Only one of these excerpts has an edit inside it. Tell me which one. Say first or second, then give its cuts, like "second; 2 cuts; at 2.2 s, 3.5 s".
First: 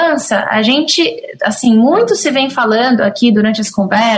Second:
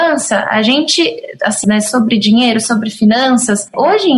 second; 1 cut; at 1.6 s